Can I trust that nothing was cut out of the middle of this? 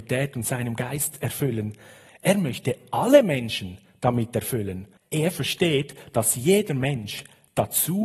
no; 1 cut; at 5.0 s

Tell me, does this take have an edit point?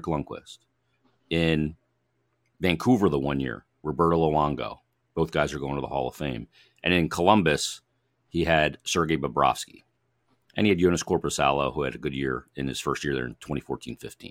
no; 0 cuts

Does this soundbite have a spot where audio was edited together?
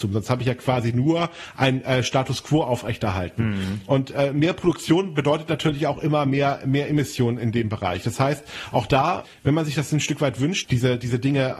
yes; 1 cut; at 10.6 s

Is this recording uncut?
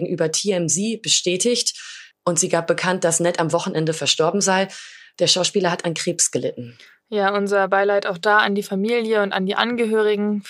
yes; 0 cuts

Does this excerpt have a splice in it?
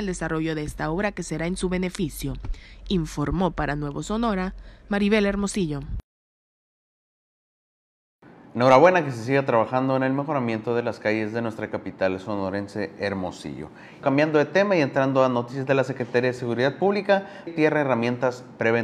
yes; 2 cuts; at 14.0 s, 17.5 s

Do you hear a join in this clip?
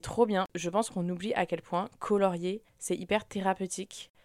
yes; 1 cut; at 2.7 s

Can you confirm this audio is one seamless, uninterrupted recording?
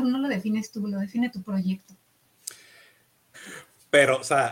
no; 1 cut; at 3.3 s

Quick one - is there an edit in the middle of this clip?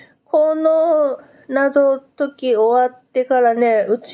no; 0 cuts

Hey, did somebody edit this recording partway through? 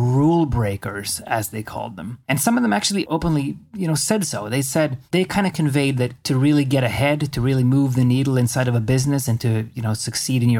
yes; 1 cut; at 5.1 s

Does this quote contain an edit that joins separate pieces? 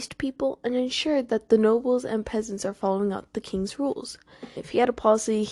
yes; 1 cut; at 4.6 s

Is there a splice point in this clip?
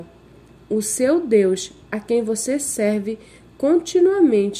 no; 0 cuts

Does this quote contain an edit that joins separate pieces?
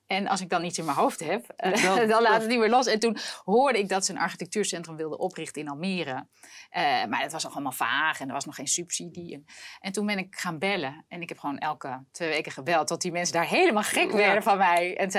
yes; 1 cut; at 1.7 s

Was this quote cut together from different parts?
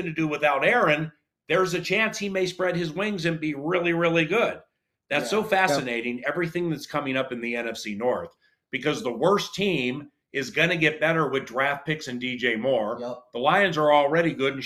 no; 0 cuts

